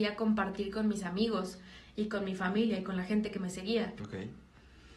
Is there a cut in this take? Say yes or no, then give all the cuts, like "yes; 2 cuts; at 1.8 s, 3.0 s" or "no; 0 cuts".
yes; 1 cut; at 4.0 s